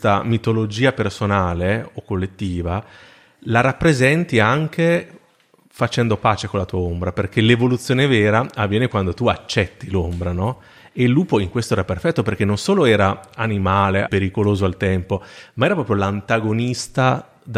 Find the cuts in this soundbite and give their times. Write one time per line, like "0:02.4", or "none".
0:14.0